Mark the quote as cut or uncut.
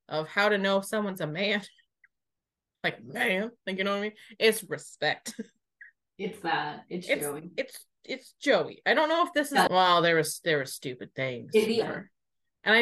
cut